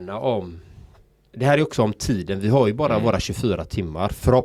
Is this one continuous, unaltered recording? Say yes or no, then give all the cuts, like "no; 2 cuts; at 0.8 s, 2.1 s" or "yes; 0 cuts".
yes; 0 cuts